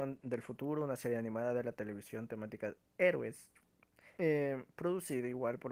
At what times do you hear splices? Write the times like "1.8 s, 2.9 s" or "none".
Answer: 4.1 s